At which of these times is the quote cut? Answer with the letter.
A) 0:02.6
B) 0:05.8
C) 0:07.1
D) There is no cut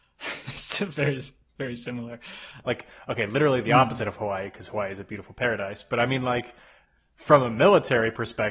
A